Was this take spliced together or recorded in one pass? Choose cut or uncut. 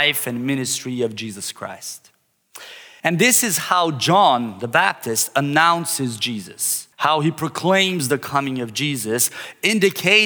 cut